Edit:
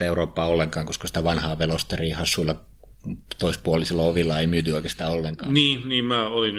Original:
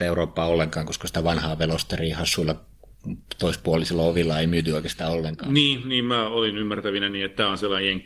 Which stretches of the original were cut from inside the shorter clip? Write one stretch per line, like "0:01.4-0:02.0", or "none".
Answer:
none